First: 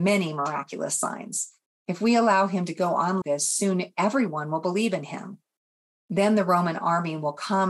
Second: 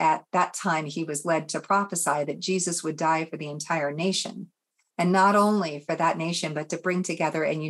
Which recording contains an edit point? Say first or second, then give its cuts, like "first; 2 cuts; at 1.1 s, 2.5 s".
first; 1 cut; at 3.2 s